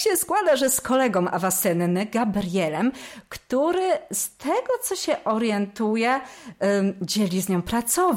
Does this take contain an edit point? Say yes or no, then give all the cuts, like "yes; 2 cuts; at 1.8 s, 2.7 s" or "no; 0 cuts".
no; 0 cuts